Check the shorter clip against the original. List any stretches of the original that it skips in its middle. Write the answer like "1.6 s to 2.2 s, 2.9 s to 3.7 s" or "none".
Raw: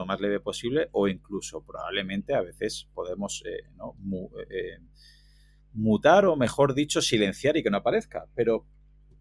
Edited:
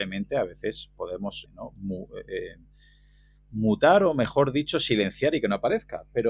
3.4 s to 3.7 s